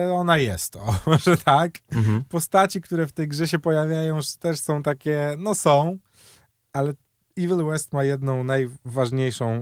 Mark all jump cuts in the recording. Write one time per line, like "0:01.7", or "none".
none